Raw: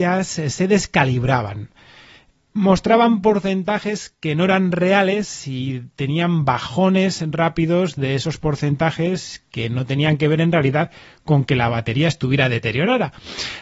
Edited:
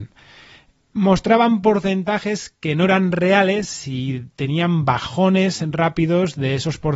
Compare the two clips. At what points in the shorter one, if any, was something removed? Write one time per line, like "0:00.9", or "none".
none